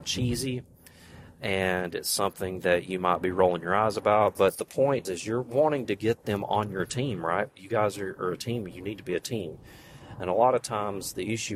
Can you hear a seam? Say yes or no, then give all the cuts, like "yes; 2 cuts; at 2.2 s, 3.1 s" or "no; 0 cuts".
yes; 1 cut; at 5.1 s